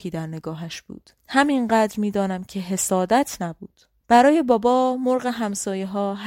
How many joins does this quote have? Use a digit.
2